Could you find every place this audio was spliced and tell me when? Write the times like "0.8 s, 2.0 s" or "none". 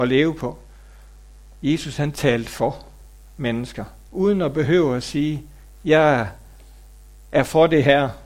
4.1 s